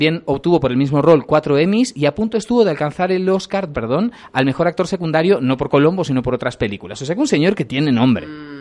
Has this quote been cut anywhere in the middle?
yes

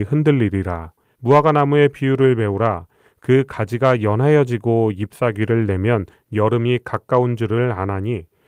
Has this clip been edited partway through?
yes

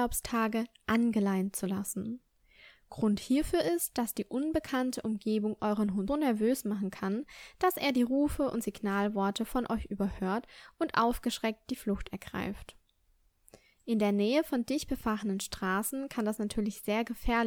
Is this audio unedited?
no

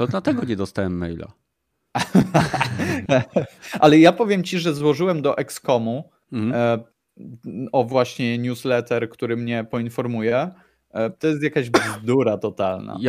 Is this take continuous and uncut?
no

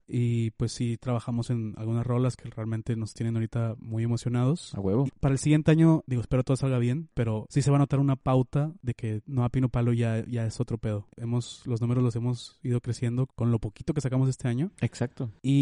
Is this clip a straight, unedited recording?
no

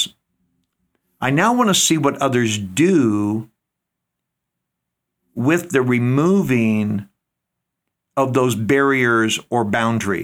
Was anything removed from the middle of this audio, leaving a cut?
no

